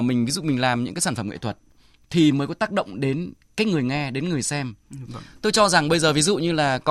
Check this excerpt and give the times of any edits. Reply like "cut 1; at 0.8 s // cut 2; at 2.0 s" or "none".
cut 1; at 5.0 s